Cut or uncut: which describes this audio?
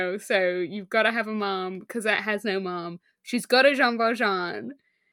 uncut